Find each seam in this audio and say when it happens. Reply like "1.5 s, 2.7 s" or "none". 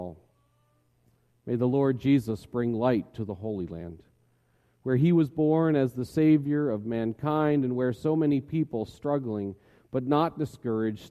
none